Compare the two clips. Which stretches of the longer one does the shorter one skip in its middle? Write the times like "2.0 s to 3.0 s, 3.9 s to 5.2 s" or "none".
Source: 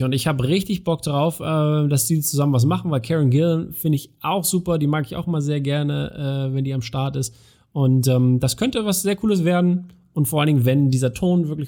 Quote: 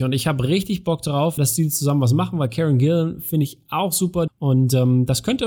1.4 s to 1.9 s, 4.8 s to 7.6 s